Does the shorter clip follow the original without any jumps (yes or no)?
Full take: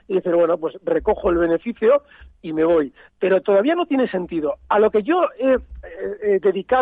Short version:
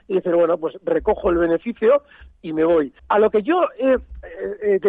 no